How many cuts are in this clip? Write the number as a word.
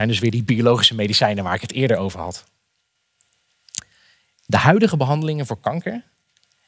one